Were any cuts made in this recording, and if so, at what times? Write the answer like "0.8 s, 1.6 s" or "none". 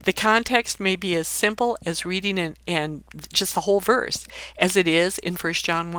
none